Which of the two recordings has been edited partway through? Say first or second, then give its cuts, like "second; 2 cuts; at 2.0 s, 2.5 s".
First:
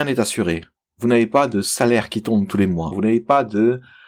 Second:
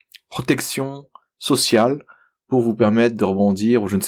first; 1 cut; at 2.9 s